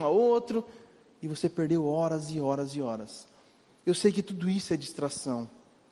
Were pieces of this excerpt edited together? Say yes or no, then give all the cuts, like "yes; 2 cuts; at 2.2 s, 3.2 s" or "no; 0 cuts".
no; 0 cuts